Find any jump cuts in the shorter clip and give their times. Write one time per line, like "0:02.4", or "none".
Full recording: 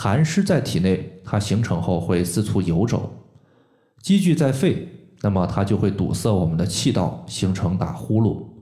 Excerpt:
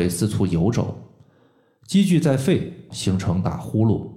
0:02.9

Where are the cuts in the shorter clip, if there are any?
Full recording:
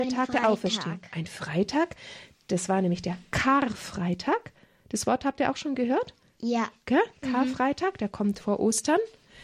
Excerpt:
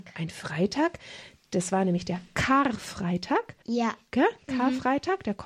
0:03.6

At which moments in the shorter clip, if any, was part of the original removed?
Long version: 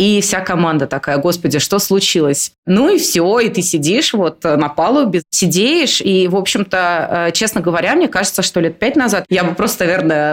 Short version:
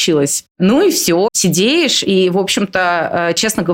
0:01.3

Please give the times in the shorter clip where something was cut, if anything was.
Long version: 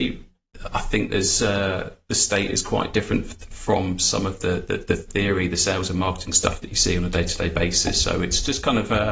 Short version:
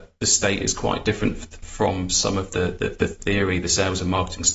none

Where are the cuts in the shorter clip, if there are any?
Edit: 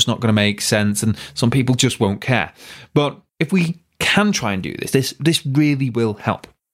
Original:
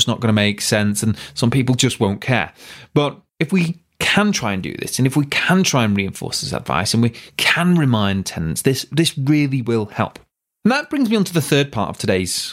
0:04.9

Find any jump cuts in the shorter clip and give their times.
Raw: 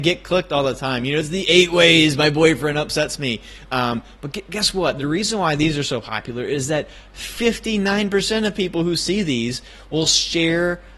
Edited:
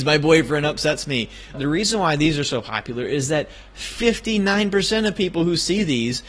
0:01.5

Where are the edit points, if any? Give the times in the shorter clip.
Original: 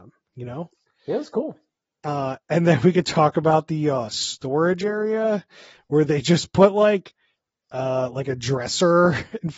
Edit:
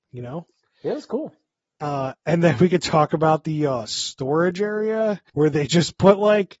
0:05.3

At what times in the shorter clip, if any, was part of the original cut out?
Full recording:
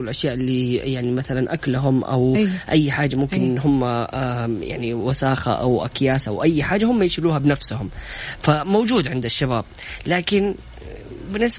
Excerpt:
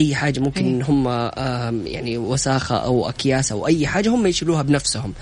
none

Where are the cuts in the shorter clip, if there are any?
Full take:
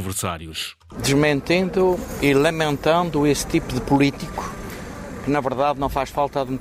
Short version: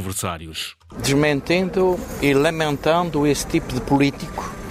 none

